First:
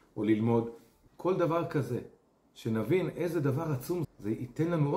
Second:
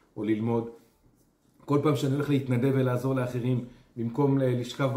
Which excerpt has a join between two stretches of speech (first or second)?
first